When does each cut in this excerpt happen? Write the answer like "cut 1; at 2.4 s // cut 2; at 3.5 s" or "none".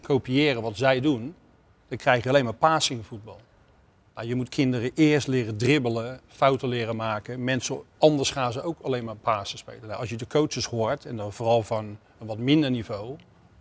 cut 1; at 7.9 s